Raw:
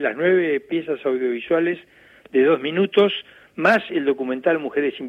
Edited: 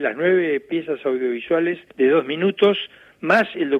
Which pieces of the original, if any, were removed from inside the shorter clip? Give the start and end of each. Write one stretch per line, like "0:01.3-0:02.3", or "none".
0:01.9-0:02.2